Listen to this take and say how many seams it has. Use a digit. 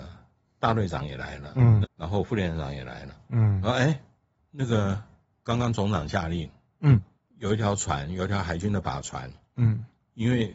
1